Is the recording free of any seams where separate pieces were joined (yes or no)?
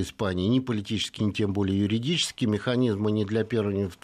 no